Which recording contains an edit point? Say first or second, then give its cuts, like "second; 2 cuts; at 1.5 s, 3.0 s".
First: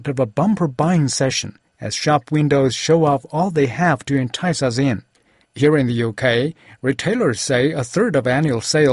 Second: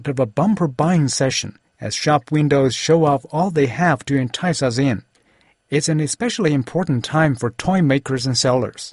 first; 1 cut; at 5.4 s